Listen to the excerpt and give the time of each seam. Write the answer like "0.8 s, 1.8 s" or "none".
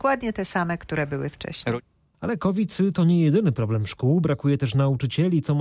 none